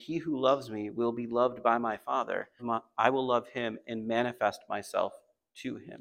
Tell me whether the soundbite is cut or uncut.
cut